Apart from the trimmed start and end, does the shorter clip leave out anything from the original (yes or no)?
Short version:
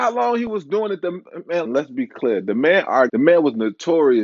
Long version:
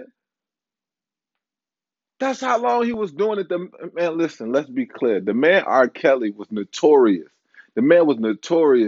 yes